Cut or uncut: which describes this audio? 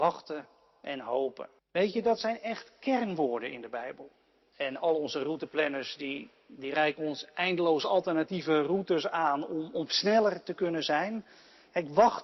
cut